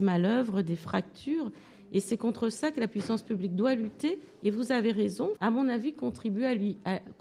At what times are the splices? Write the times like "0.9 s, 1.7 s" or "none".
5.4 s